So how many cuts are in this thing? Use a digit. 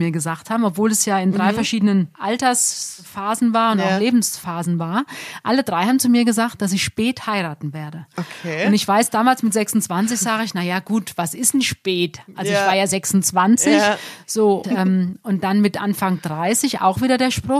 1